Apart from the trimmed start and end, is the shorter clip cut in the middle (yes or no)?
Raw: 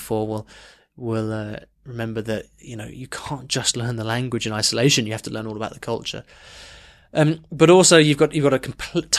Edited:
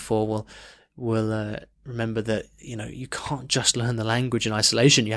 no